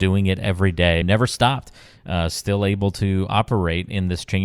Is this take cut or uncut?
cut